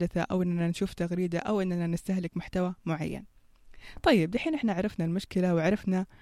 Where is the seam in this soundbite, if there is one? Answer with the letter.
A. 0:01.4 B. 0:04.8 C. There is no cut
C